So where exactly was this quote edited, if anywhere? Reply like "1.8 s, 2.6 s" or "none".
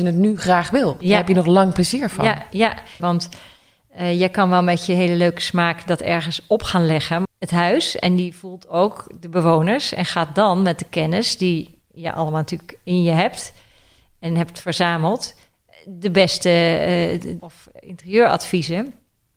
3.0 s, 7.2 s, 17.4 s